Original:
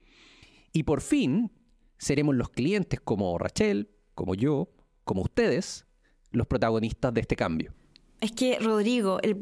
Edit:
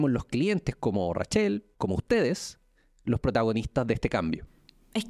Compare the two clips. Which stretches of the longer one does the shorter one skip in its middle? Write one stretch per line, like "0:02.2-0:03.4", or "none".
0:04.0-0:05.0